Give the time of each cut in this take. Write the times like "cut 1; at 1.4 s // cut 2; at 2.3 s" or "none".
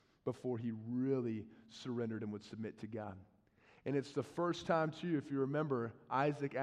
none